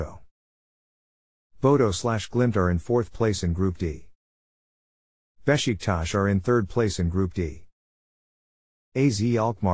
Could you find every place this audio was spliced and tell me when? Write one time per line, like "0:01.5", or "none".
none